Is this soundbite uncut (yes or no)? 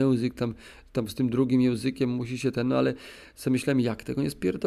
yes